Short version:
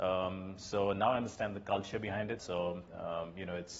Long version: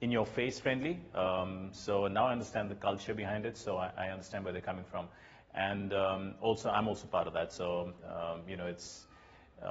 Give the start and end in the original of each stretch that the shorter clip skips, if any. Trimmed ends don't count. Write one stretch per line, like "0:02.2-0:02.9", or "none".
0:03.5-0:07.5

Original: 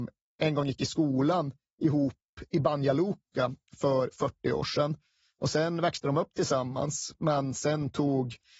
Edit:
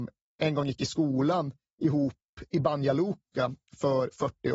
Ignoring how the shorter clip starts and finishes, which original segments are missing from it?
none

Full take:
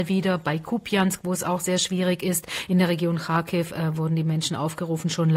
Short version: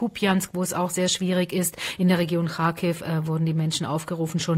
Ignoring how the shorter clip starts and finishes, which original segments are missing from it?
none

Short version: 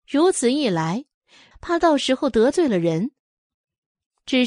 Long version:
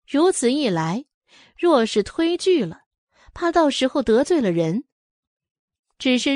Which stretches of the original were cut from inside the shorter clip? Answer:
0:01.5-0:03.2

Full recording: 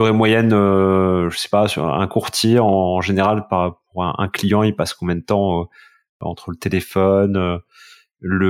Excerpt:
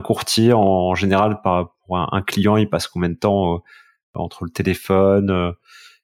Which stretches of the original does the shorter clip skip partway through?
none

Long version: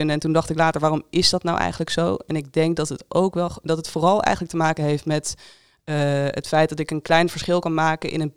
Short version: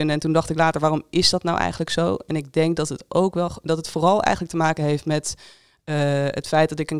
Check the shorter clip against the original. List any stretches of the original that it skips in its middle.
none

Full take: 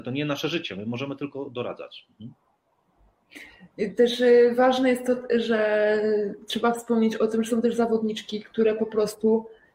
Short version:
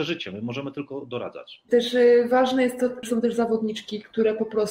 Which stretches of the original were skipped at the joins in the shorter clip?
0:02.1-0:03.9
0:05.3-0:07.4

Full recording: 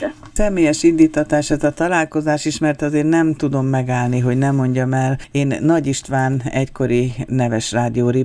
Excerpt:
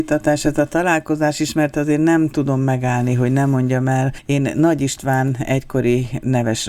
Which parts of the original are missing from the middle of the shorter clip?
none

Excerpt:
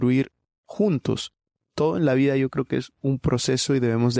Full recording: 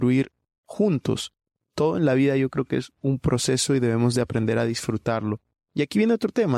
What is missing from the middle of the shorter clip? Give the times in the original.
none

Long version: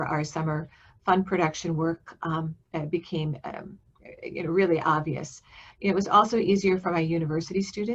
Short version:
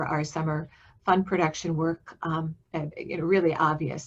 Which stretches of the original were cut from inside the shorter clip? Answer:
0:02.9-0:04.2

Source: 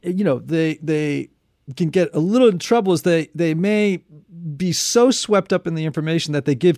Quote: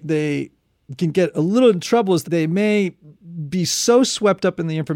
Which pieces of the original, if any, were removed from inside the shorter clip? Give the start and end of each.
0:03.0-0:03.3

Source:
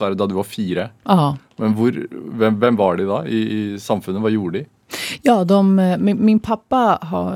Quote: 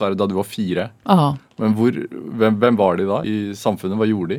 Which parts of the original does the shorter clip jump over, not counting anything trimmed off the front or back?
0:03.2-0:03.5

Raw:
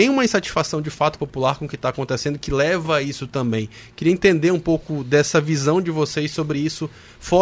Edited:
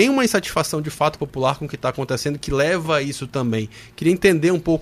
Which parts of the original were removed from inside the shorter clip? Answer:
none

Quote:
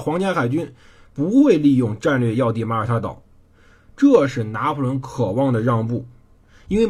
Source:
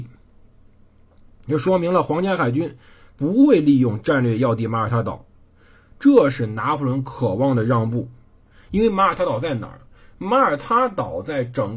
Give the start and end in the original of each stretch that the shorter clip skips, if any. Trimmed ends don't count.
none

